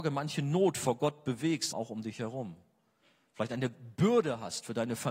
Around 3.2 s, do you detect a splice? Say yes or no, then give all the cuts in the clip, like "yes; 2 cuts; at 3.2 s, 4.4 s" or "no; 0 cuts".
no; 1 cut; at 1.7 s